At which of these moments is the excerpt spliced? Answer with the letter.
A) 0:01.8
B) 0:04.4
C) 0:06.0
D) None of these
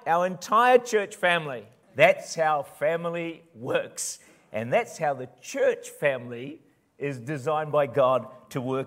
A